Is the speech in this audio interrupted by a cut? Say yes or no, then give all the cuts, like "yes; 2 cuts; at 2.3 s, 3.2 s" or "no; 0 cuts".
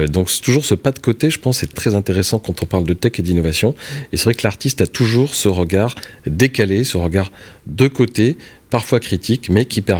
yes; 1 cut; at 1.7 s